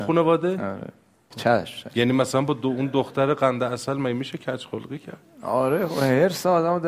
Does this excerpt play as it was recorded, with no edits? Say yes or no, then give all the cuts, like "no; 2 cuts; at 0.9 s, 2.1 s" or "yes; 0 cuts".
no; 1 cut; at 1.3 s